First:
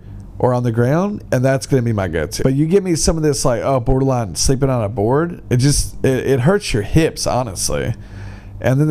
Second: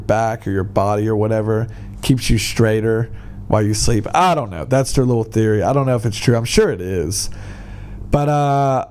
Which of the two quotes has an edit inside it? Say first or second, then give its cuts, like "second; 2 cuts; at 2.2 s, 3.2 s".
first; 1 cut; at 2.4 s